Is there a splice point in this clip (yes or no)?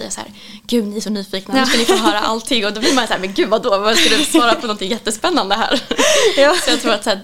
no